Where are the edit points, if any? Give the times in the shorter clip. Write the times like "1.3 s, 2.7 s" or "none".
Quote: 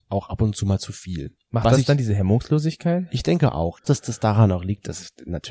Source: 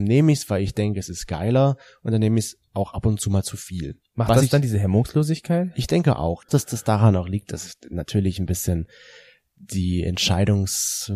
none